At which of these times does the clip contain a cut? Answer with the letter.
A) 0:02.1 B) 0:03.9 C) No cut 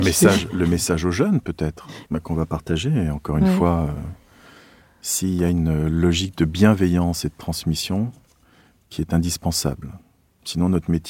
A